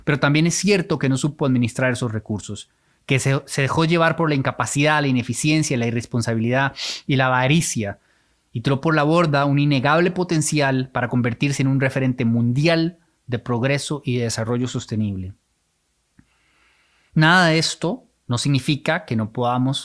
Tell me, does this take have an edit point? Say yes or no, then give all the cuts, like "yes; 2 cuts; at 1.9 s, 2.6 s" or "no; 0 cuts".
no; 0 cuts